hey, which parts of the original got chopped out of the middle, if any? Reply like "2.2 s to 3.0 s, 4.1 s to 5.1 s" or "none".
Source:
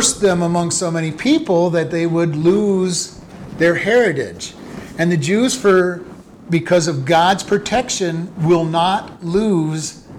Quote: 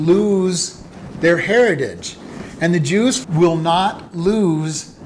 5.6 s to 8.3 s